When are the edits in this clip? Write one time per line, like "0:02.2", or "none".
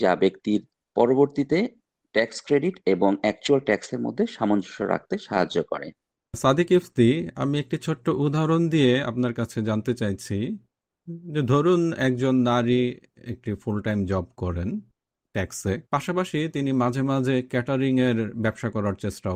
0:15.9

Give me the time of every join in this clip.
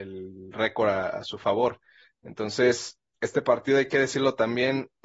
none

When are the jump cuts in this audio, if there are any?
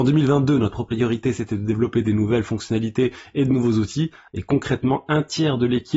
0:04.3

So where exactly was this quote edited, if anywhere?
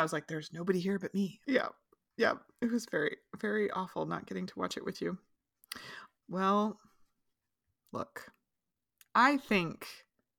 0:01.4
0:06.2

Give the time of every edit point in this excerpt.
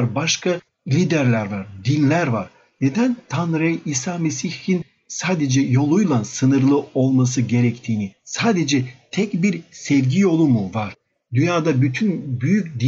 none

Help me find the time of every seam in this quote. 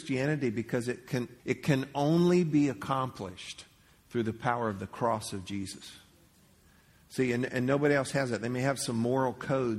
0:01.4

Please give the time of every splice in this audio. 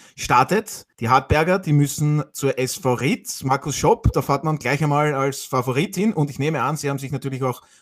0:00.9

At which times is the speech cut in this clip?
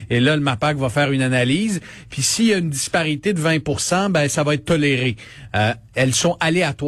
0:05.5

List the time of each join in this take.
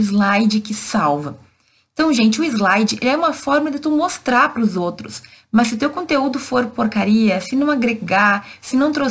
none

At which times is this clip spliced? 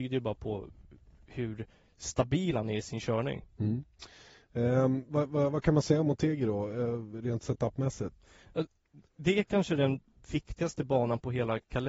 none

